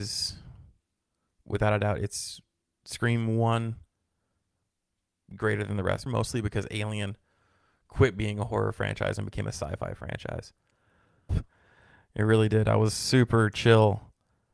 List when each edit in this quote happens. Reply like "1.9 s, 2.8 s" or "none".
6.1 s, 11.3 s